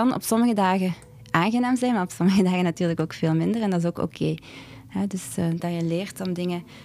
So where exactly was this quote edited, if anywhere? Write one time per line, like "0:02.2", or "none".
0:05.6